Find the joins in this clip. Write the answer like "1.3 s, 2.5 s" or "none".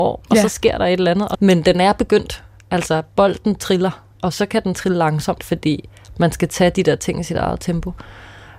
1.3 s, 4.1 s, 5.4 s